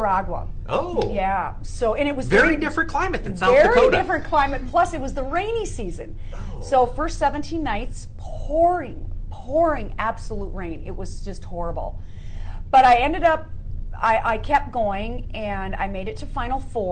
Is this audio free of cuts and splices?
yes; 0 cuts

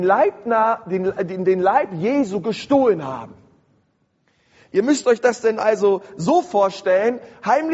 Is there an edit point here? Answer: no; 0 cuts

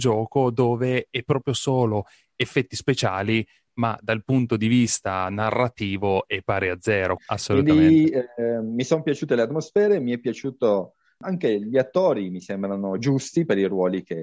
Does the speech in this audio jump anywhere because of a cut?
yes; 1 cut; at 7.2 s

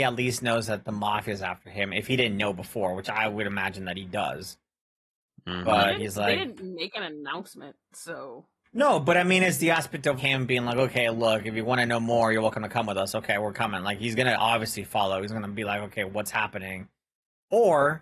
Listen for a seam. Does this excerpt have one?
yes; 1 cut; at 10.2 s

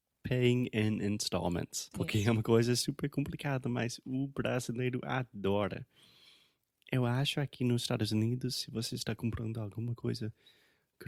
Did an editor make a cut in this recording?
yes; 1 cut; at 1.9 s

